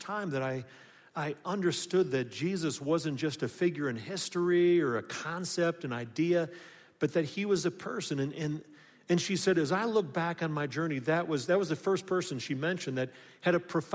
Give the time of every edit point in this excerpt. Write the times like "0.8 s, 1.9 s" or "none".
none